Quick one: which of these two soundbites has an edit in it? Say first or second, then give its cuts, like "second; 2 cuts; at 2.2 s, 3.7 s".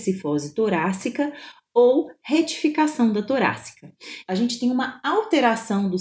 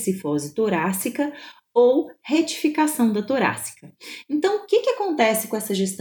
first; 1 cut; at 4.3 s